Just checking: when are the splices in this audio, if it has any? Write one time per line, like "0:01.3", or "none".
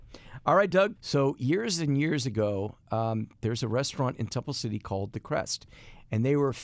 0:01.0